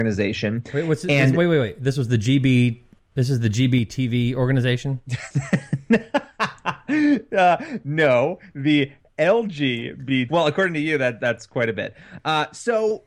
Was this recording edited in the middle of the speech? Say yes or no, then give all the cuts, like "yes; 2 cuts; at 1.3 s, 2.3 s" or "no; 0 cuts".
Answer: yes; 1 cut; at 10.3 s